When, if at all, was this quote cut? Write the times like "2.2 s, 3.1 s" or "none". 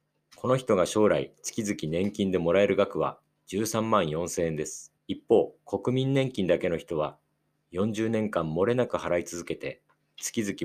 5.0 s